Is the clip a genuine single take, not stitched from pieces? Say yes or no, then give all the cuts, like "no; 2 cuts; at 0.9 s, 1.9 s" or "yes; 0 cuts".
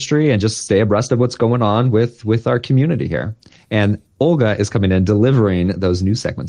yes; 0 cuts